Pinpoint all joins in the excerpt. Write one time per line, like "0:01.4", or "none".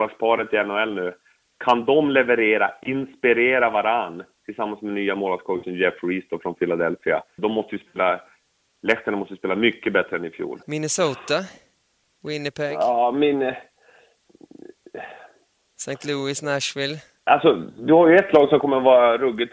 0:07.4
0:10.6